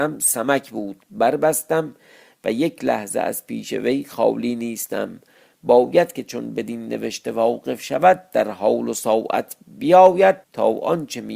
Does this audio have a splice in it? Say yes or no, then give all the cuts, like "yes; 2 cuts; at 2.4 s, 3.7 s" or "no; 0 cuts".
yes; 1 cut; at 10.4 s